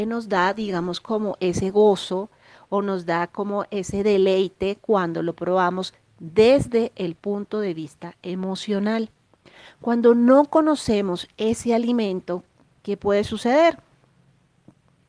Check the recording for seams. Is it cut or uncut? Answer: uncut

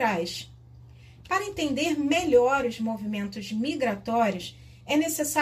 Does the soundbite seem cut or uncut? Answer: cut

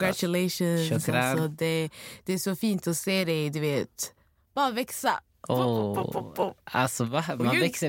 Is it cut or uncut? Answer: uncut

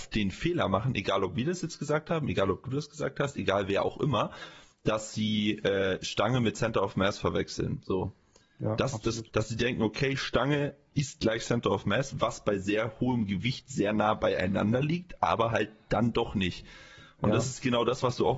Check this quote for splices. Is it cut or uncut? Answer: cut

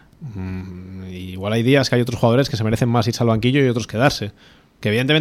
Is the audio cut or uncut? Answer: uncut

